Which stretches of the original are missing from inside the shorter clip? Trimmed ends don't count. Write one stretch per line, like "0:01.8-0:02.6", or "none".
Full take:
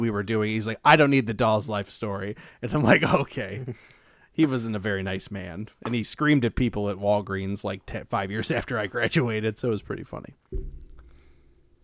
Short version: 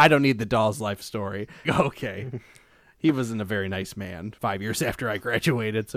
0:02.5-0:03.0
0:05.7-0:08.1

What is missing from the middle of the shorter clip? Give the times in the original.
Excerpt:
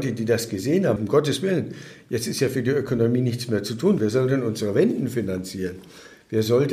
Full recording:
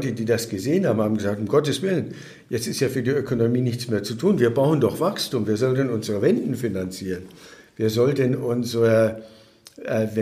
0:01.0-0:01.4
0:04.4-0:05.5

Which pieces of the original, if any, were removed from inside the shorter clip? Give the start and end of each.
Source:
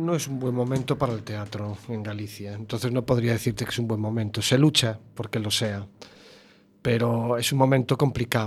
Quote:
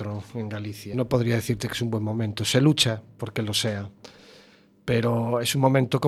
0:02.5-0:02.9

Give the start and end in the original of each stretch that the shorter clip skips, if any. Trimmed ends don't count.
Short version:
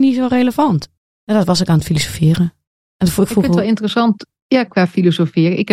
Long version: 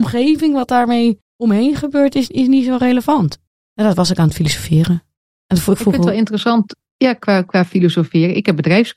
0:07.2-0:07.4

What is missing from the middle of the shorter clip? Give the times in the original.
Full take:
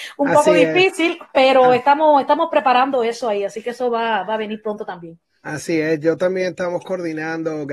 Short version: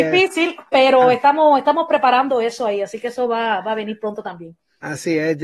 none

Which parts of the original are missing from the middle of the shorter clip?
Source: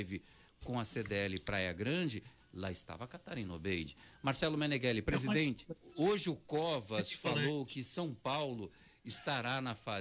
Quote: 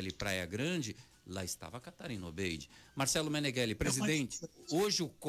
none

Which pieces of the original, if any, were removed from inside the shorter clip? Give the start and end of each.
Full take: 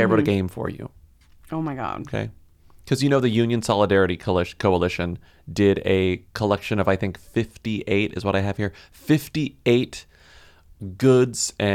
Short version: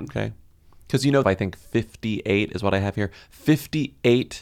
0:03.2-0:06.8

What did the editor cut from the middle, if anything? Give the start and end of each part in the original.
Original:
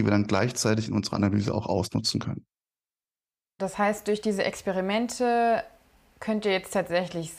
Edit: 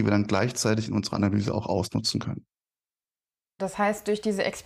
none

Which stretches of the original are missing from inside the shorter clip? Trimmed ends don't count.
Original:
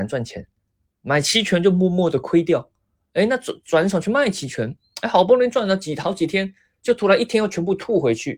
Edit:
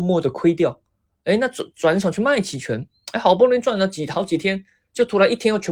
none

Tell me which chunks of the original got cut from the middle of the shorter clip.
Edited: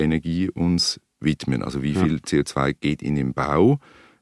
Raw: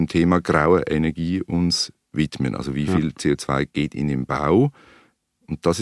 none

